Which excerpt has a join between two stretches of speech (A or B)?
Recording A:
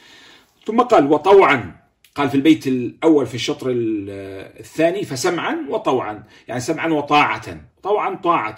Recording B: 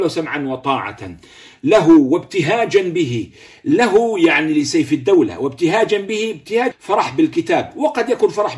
B